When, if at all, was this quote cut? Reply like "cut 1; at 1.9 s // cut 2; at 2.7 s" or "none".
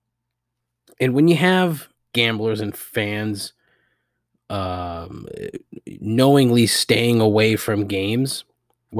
cut 1; at 2.1 s